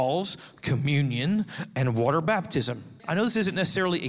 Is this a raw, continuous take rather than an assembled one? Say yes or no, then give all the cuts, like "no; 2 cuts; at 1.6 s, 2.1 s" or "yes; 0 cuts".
no; 1 cut; at 3.0 s